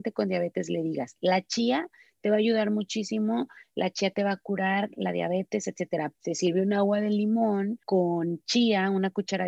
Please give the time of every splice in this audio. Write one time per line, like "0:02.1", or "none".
0:06.1
0:07.8